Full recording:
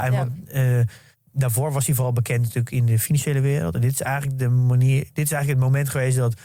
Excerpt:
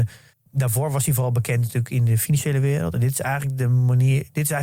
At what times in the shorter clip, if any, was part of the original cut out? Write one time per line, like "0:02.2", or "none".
none